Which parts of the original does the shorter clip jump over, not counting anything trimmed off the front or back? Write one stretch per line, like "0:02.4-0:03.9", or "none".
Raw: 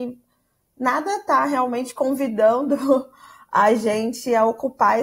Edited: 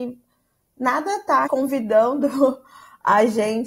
0:01.5-0:01.9